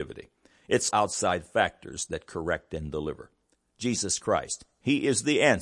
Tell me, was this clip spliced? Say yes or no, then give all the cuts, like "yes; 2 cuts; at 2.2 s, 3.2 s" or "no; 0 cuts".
yes; 1 cut; at 0.9 s